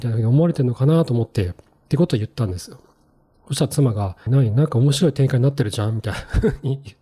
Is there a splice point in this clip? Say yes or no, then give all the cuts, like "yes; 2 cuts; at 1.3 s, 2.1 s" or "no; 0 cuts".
yes; 1 cut; at 4.3 s